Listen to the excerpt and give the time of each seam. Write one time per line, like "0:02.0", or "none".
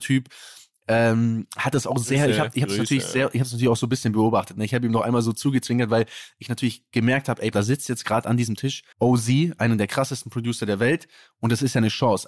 0:07.5
0:08.9